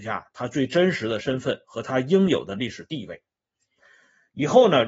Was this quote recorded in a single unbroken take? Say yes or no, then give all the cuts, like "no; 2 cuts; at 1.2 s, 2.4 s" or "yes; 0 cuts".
yes; 0 cuts